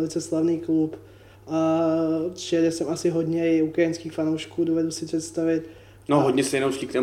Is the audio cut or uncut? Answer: uncut